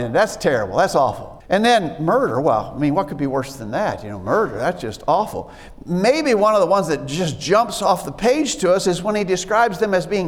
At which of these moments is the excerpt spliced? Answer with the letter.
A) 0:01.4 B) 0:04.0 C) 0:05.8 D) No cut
A